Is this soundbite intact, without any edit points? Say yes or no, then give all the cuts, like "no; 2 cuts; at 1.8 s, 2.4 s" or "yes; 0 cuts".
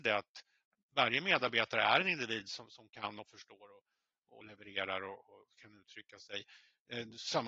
yes; 0 cuts